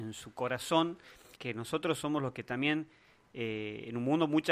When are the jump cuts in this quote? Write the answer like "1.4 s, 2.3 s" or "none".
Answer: 1.4 s